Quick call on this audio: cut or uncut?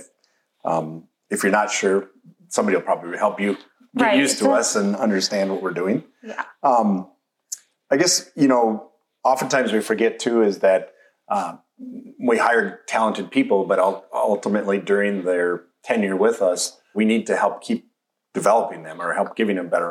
cut